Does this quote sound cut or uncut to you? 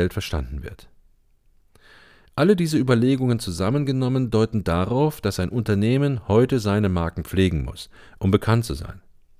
uncut